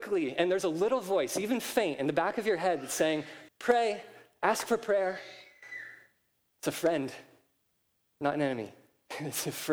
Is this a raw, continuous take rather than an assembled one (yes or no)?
no